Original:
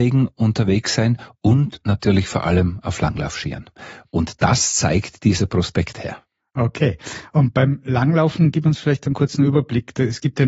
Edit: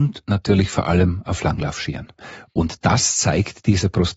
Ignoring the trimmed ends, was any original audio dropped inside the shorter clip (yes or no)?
no